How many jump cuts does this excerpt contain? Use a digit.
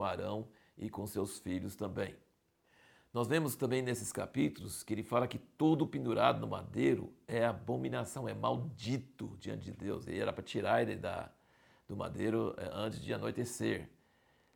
0